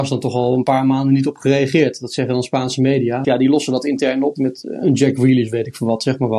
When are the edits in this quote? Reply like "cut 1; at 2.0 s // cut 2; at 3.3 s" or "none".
cut 1; at 3.2 s // cut 2; at 4.4 s